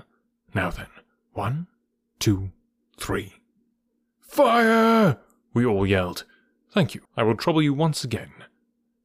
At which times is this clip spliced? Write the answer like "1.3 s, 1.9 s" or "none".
7.1 s